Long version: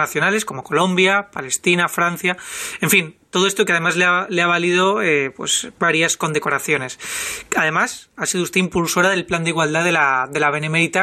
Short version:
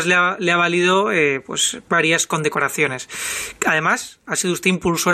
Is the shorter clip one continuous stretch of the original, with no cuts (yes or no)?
yes